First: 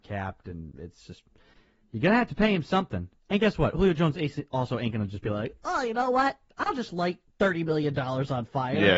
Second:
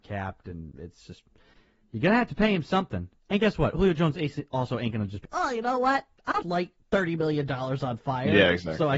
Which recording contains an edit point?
second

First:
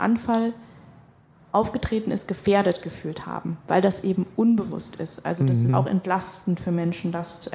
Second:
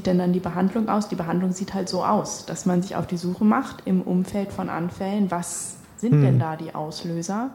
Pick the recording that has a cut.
first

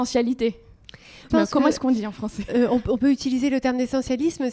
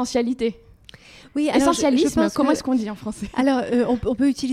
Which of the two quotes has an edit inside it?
first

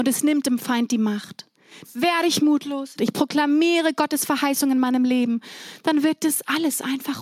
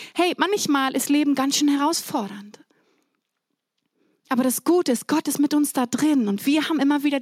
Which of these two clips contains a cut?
first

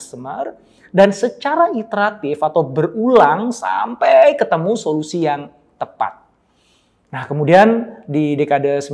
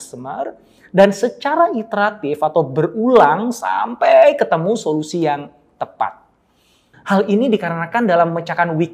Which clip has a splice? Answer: second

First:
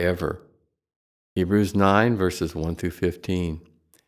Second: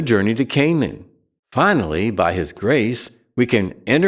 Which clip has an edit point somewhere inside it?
second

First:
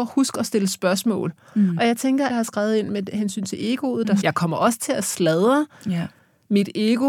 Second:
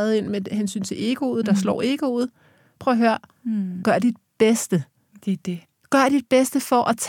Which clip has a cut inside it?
first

